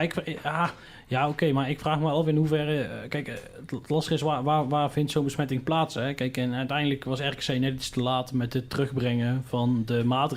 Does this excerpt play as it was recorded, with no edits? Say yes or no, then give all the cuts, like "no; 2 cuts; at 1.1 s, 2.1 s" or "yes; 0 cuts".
yes; 0 cuts